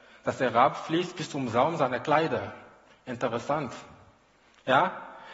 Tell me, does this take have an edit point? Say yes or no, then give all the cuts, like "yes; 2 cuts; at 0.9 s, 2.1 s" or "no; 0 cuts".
no; 0 cuts